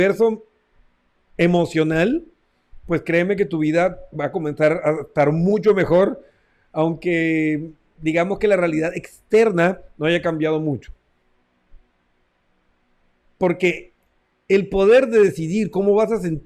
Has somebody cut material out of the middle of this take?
no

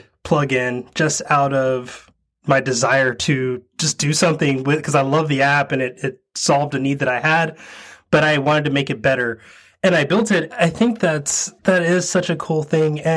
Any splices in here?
yes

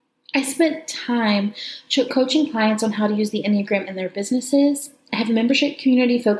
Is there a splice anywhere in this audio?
no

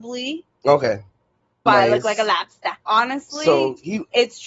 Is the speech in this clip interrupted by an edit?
yes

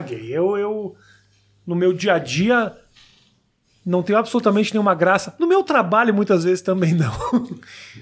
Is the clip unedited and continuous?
yes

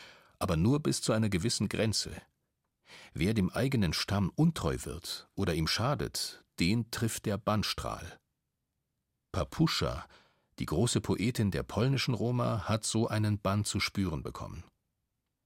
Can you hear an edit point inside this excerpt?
no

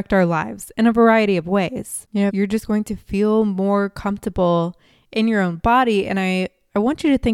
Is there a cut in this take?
yes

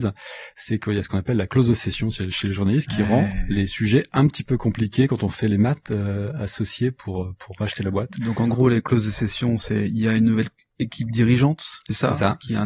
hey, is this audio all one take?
yes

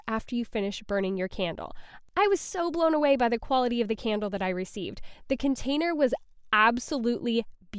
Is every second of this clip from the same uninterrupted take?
yes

